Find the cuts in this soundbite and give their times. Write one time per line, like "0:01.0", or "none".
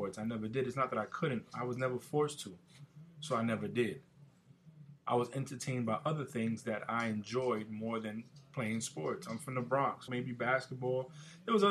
0:10.1